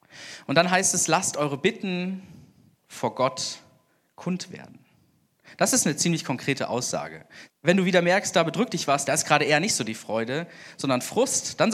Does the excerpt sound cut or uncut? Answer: cut